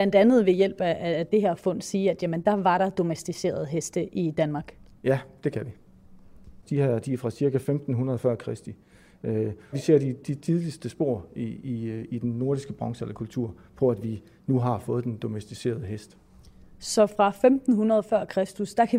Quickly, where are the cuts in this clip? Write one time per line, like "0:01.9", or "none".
0:06.6
0:09.7